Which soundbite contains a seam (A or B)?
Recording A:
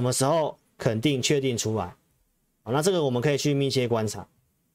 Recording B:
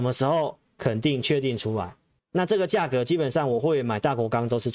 B